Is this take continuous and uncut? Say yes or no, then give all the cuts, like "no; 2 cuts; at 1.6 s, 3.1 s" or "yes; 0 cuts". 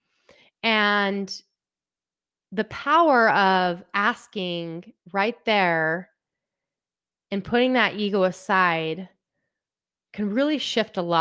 yes; 0 cuts